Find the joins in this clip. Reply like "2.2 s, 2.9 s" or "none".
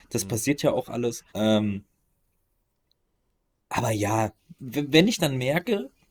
1.3 s, 4.6 s